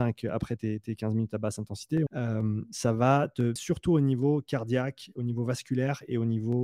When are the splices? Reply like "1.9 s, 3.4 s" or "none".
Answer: 2.1 s, 3.6 s